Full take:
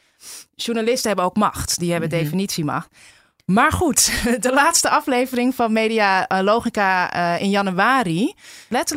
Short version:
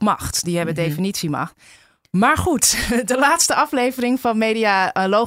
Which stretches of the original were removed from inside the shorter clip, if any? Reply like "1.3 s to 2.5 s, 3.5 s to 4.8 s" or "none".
none